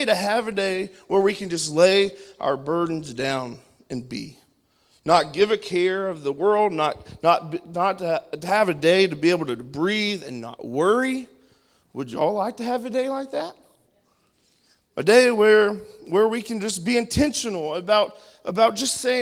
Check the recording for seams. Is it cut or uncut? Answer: uncut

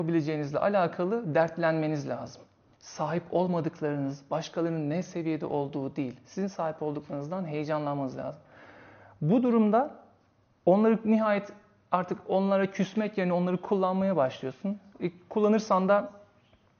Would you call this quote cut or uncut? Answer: uncut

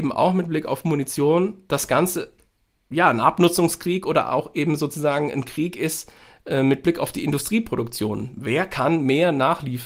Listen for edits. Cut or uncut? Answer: uncut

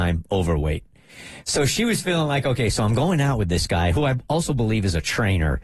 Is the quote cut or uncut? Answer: uncut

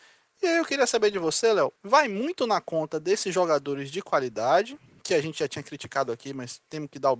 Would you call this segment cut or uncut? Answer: cut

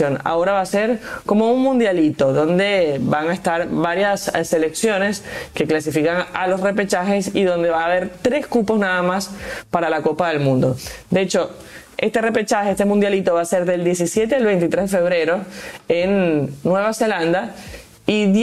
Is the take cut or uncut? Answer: uncut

